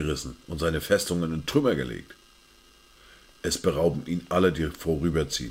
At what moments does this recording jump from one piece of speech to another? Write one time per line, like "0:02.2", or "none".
none